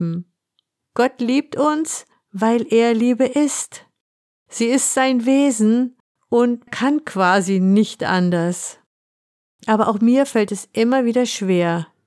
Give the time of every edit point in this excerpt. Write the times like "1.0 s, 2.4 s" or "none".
6.7 s, 9.5 s

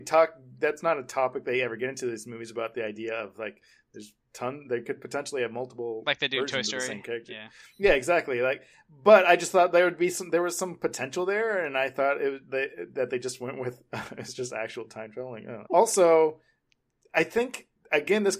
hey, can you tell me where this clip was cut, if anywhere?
15.7 s

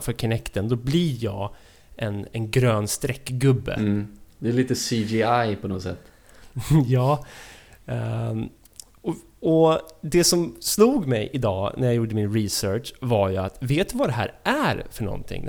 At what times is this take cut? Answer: none

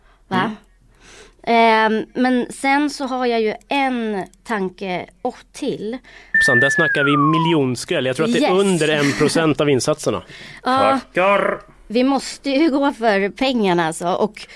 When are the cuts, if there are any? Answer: 6.3 s

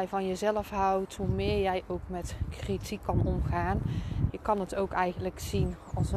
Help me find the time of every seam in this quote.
1.2 s, 4.3 s

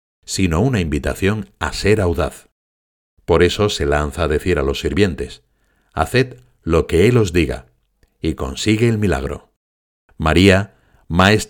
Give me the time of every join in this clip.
none

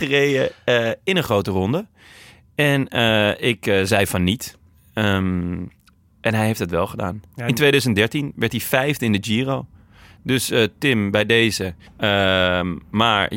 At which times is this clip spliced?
11.9 s

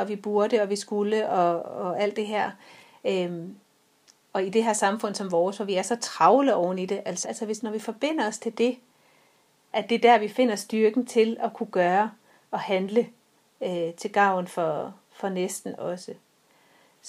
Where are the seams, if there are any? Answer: 7.2 s, 9.7 s

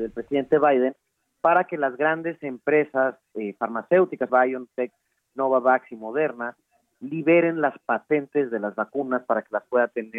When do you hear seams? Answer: 4.3 s

